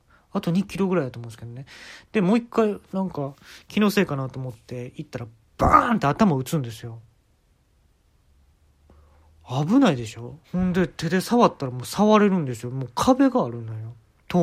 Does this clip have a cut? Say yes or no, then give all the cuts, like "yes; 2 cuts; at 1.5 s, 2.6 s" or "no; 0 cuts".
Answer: yes; 1 cut; at 10.4 s